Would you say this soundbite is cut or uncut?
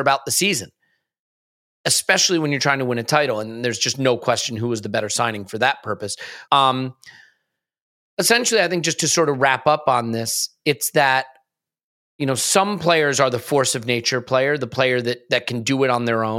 cut